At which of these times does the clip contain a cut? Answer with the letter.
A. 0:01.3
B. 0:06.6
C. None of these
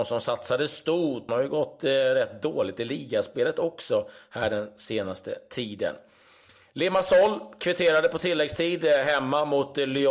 A